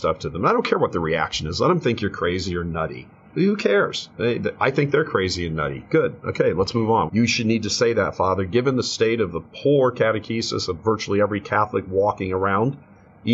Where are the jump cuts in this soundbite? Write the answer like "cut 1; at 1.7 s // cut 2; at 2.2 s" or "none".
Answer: cut 1; at 7.1 s